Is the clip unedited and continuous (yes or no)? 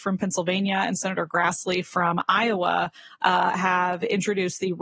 yes